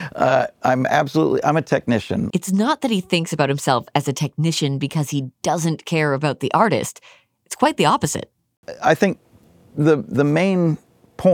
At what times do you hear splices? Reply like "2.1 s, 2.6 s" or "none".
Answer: 2.3 s